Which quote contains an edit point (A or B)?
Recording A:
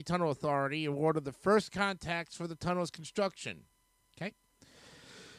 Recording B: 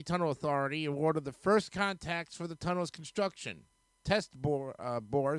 A